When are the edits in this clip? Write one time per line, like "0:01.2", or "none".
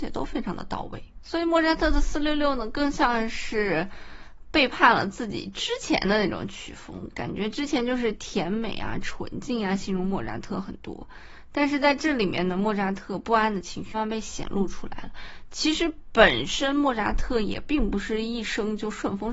0:13.9